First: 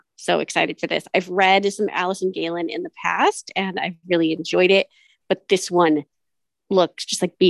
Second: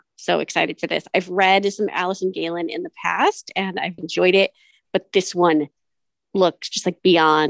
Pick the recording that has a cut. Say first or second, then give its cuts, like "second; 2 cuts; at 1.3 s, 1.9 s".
second; 1 cut; at 4.0 s